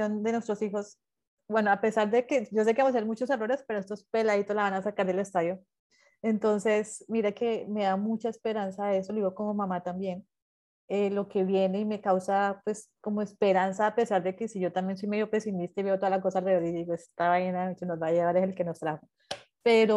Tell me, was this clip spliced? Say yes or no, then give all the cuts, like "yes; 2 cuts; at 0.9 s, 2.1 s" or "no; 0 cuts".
no; 0 cuts